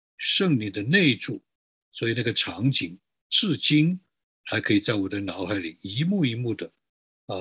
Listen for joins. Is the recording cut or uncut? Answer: cut